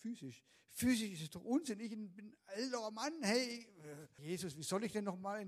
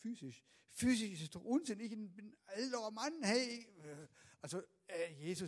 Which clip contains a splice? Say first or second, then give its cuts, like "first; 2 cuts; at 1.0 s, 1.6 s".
first; 1 cut; at 4.2 s